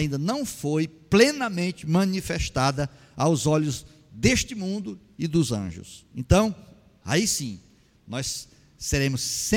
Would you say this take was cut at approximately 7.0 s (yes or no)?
yes